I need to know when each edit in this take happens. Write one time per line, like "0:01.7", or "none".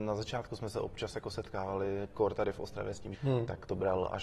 0:03.1